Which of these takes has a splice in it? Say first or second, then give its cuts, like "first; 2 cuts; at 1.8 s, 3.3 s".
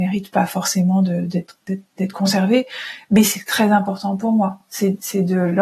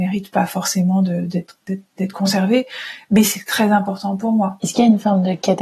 second; 1 cut; at 4.6 s